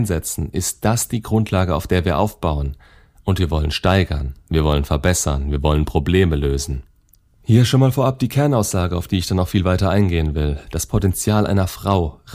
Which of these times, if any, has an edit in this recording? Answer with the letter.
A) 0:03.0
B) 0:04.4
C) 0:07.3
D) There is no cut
C